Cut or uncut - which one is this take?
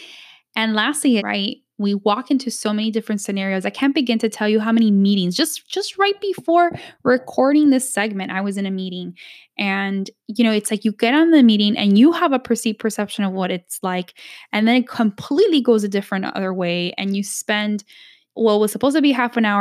cut